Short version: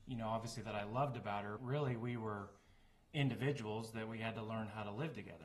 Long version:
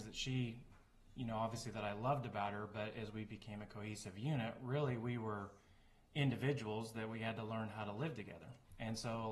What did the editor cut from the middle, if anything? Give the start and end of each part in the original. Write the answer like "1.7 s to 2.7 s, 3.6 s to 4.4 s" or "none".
2.7 s to 4.6 s